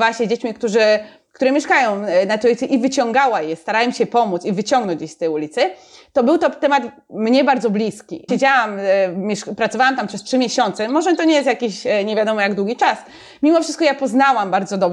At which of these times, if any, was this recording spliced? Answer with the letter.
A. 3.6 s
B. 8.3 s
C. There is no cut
B